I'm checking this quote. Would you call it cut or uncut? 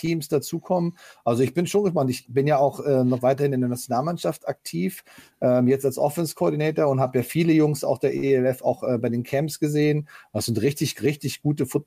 cut